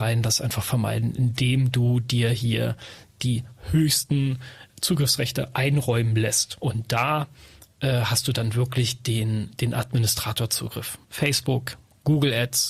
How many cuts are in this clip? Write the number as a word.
two